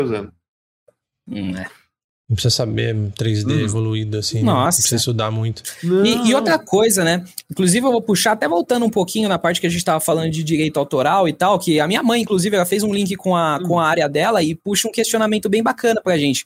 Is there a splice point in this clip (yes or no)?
no